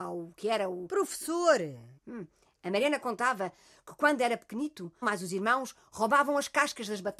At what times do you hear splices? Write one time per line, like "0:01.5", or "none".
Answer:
0:02.0
0:05.0

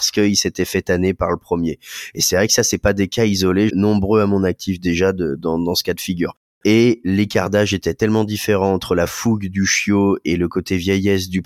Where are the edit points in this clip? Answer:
0:03.7
0:06.5

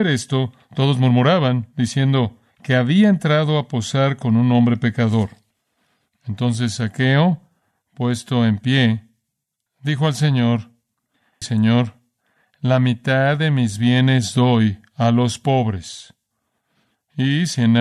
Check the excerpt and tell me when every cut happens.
0:11.4

